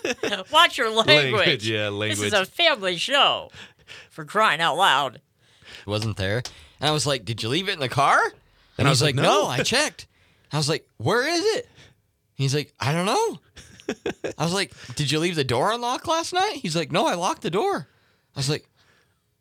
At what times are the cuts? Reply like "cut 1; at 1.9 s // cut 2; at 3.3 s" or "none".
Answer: cut 1; at 5.9 s